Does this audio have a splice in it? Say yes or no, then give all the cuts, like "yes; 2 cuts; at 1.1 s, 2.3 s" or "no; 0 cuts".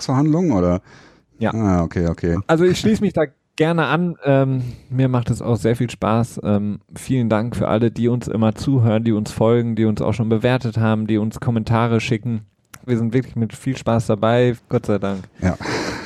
yes; 3 cuts; at 2.3 s, 12.9 s, 14.6 s